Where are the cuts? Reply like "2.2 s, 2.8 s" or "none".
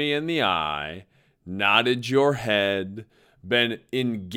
none